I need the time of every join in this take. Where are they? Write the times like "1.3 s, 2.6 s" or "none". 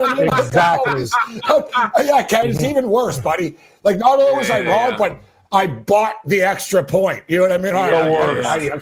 none